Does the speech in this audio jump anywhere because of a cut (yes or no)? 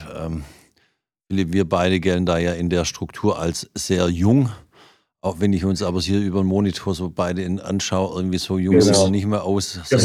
no